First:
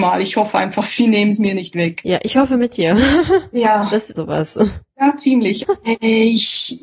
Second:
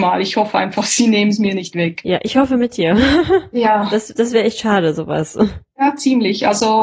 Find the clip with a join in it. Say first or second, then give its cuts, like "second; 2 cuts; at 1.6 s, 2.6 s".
first; 2 cuts; at 4.1 s, 5.6 s